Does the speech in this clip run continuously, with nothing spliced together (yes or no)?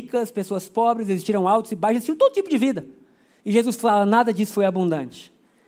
yes